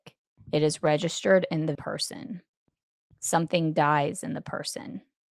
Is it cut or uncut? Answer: cut